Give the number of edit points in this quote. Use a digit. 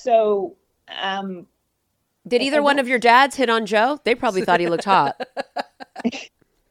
0